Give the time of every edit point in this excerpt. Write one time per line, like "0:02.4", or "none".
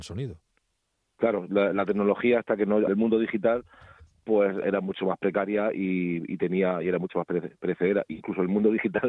0:02.9
0:04.6